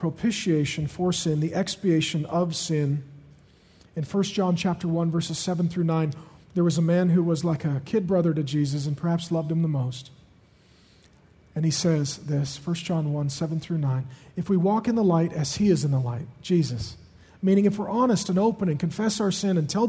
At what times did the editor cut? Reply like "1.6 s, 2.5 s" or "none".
none